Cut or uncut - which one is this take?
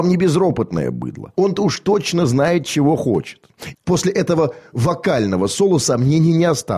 cut